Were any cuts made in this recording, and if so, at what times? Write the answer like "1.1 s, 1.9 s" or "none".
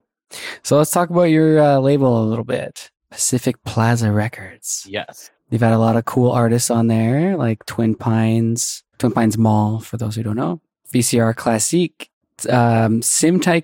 8.9 s